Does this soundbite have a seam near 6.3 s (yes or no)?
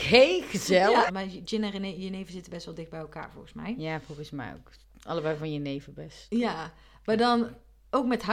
no